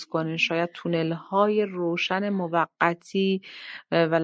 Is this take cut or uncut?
uncut